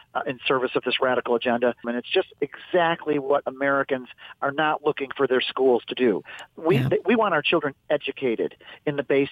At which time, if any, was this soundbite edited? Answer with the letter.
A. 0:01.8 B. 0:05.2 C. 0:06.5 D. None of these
A